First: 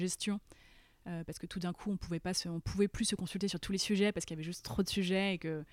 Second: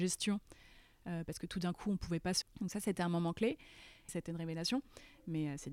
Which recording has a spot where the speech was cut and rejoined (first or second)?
second